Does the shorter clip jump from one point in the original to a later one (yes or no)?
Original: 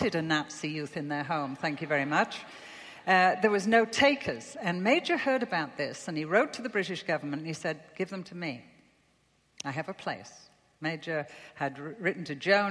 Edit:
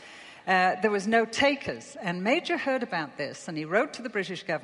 no